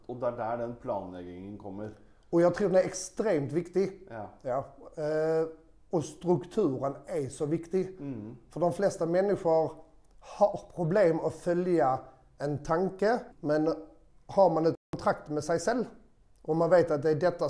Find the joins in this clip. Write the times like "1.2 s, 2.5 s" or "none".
13.3 s